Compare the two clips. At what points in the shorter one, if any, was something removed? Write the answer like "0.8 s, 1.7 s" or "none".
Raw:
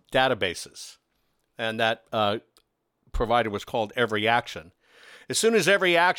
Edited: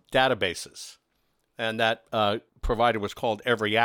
2.5 s